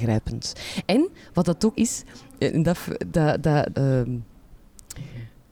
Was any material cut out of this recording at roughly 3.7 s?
yes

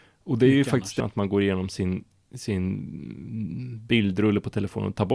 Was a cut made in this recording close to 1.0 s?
yes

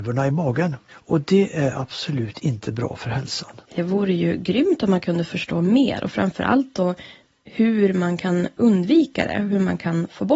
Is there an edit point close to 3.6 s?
yes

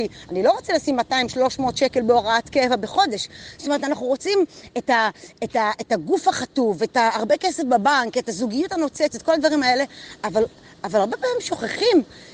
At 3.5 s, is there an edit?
no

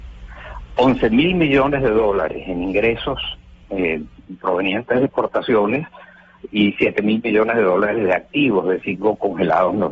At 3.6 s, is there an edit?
yes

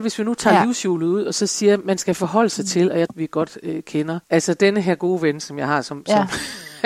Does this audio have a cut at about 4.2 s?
yes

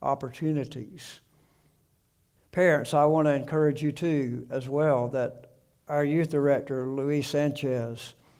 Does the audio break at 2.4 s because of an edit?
yes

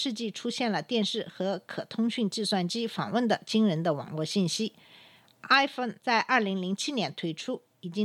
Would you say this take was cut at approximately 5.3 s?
no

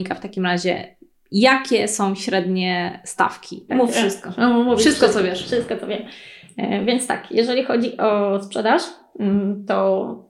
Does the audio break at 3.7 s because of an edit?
yes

